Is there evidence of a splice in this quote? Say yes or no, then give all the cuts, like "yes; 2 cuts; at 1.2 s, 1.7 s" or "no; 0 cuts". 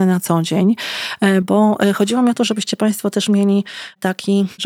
no; 0 cuts